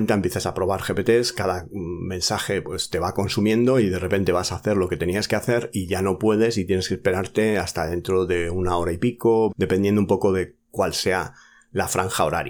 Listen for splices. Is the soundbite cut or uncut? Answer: cut